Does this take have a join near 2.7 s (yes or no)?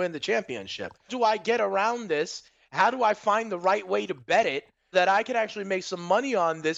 no